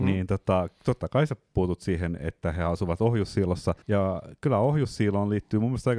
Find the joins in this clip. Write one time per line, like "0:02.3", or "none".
0:03.8